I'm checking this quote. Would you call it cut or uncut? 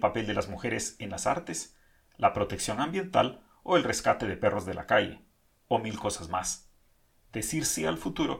cut